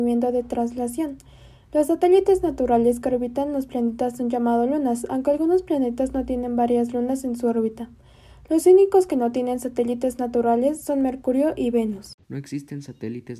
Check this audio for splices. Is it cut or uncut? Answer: cut